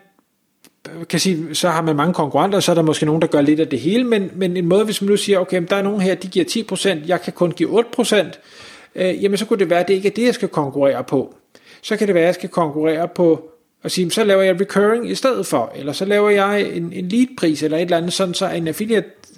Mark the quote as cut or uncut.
uncut